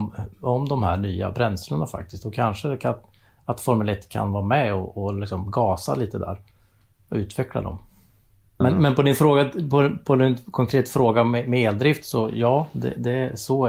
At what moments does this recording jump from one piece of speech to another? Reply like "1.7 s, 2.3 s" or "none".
none